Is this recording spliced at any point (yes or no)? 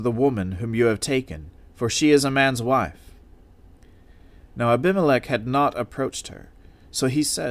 no